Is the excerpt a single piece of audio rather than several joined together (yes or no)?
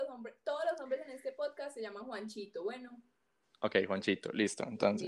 yes